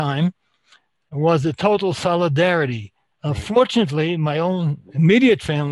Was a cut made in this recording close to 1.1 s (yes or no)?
no